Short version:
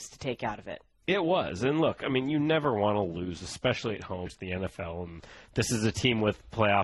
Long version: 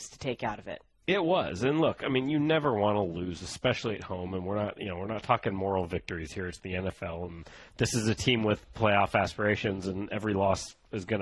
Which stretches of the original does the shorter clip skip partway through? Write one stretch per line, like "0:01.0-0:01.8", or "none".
0:04.3-0:06.5